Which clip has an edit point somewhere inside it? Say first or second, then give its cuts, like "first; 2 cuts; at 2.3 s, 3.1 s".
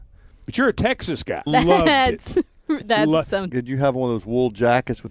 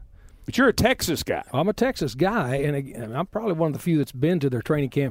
first; 2 cuts; at 1.5 s, 3.5 s